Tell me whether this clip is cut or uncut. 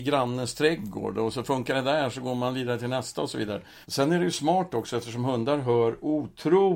cut